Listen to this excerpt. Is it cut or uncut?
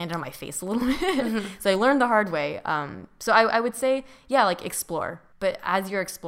uncut